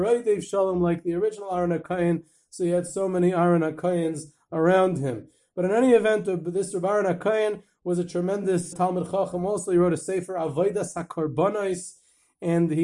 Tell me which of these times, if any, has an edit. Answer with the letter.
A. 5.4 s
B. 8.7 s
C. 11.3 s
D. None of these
B